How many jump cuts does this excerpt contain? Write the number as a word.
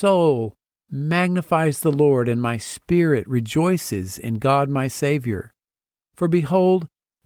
one